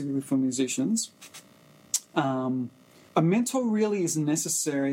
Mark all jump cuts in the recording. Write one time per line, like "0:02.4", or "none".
0:03.1